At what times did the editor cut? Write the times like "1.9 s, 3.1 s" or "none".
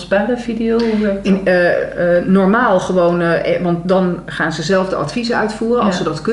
none